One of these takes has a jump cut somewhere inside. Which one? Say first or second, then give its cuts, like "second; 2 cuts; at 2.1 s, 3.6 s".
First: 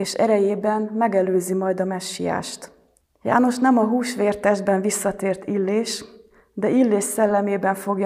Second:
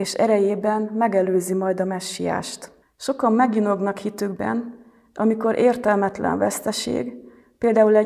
second; 1 cut; at 2.8 s